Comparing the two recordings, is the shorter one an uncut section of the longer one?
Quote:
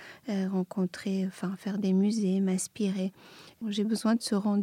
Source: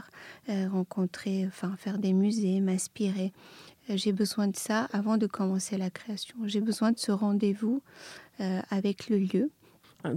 no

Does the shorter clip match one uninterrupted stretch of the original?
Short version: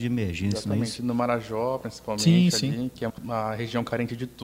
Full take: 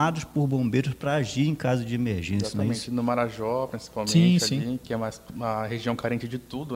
no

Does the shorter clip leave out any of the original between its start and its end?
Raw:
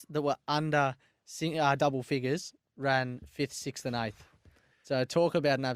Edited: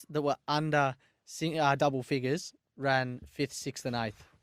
no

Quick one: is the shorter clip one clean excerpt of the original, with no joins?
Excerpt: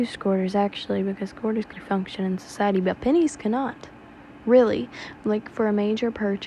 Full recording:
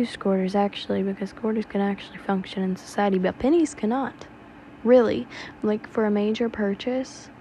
no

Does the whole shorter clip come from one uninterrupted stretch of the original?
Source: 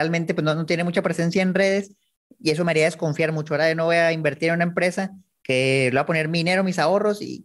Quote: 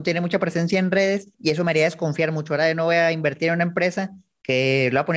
no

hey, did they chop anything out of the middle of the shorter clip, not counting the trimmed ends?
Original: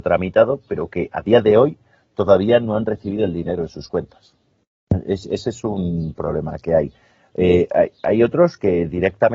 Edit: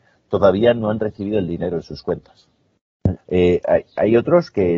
yes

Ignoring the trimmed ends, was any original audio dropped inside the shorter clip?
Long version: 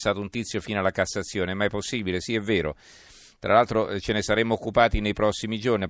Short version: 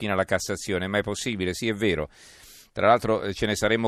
no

